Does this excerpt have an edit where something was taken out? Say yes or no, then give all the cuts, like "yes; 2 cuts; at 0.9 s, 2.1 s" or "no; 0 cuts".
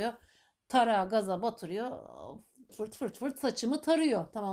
yes; 1 cut; at 2.7 s